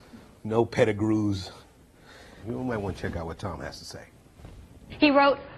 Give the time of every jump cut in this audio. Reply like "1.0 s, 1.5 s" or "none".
2.4 s